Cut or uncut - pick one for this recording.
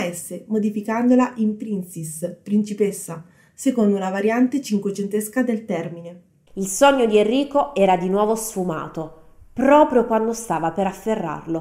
uncut